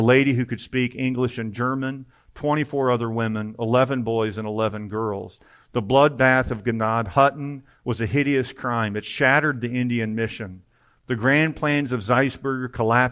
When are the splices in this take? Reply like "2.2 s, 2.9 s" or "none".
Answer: none